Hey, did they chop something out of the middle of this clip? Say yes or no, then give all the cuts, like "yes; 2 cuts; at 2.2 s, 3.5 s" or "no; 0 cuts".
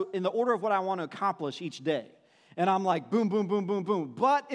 no; 0 cuts